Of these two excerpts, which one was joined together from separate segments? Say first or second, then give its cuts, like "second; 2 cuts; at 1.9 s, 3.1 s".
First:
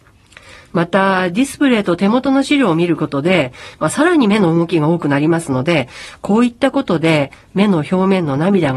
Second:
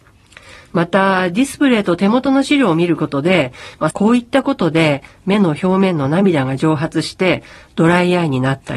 second; 1 cut; at 3.9 s